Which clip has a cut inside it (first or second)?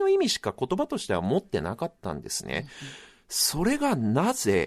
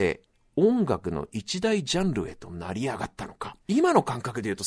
second